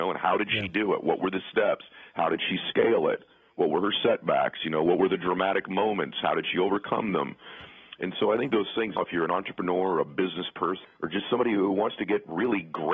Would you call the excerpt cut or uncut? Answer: cut